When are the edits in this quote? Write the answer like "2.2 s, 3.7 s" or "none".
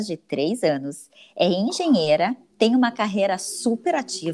none